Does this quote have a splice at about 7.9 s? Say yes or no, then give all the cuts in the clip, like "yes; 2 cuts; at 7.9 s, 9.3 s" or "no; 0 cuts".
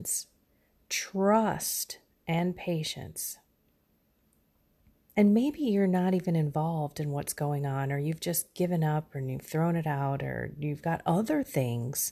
no; 1 cut; at 5.1 s